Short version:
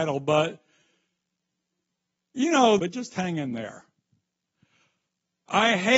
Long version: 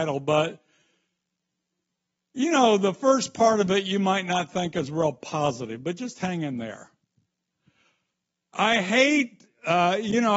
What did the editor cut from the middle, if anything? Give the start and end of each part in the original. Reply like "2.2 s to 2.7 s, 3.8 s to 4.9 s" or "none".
2.8 s to 5.8 s